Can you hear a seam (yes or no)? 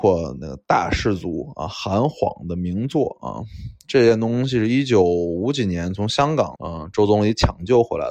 yes